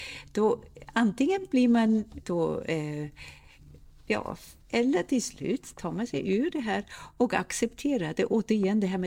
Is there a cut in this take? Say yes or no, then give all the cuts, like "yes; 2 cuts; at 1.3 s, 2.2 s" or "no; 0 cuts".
yes; 2 cuts; at 2.2 s, 4.6 s